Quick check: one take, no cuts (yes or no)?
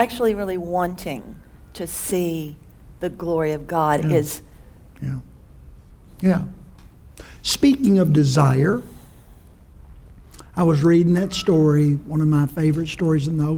no